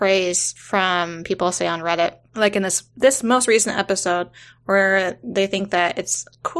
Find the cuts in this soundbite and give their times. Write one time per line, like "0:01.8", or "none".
0:02.9